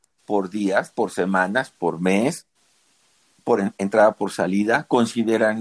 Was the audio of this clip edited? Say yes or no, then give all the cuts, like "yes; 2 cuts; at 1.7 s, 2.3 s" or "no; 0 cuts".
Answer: no; 0 cuts